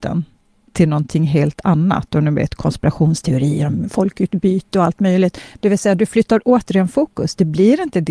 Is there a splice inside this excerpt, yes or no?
no